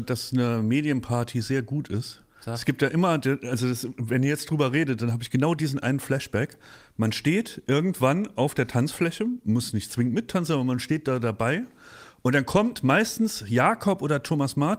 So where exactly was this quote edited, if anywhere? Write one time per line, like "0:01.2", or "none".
0:02.3